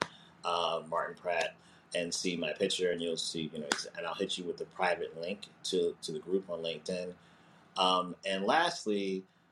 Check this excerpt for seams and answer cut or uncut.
uncut